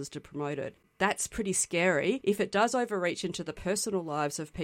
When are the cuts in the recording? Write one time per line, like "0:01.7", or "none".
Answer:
none